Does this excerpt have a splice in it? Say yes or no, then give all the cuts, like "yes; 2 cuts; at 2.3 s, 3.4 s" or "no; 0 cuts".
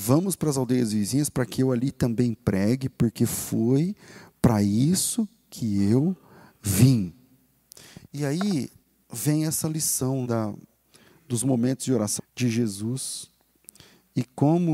yes; 2 cuts; at 10.3 s, 12.2 s